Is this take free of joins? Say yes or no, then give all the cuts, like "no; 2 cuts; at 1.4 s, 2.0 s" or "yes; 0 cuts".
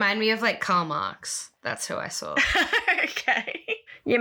yes; 0 cuts